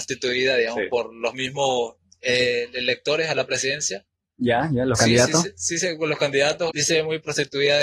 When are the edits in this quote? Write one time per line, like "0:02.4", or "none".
0:06.7